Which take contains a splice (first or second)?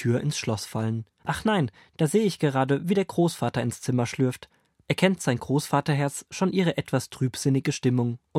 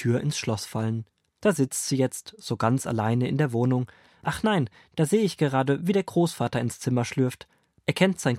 first